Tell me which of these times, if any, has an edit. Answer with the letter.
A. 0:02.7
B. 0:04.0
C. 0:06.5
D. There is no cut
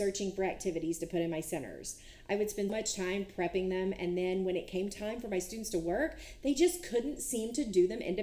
A